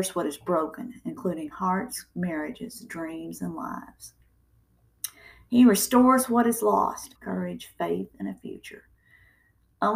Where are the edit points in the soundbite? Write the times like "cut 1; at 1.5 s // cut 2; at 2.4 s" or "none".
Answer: cut 1; at 7.1 s